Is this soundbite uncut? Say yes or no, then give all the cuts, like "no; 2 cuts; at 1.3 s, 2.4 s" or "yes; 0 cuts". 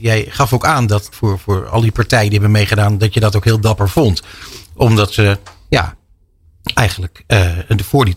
no; 1 cut; at 1.1 s